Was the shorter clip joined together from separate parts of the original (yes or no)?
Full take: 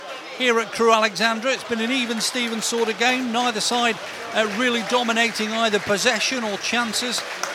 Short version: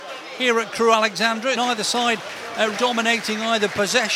yes